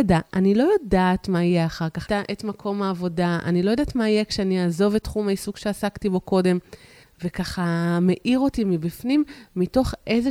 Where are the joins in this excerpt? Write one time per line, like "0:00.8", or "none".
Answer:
0:02.1
0:07.0

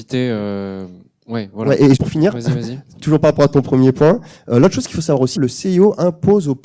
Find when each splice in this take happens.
0:02.0
0:05.4

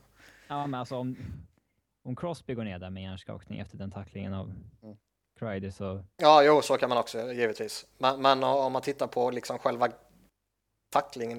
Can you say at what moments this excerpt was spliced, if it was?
none

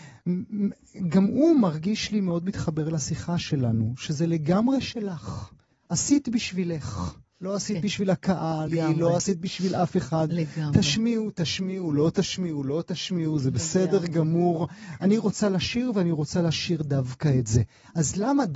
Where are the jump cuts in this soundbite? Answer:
0:08.7

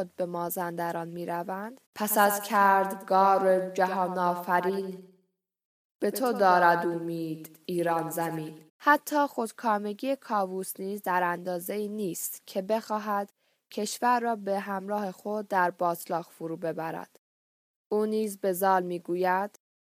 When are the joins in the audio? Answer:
0:01.9
0:08.7

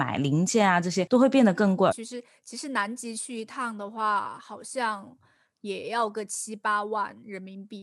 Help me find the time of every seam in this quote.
0:01.9

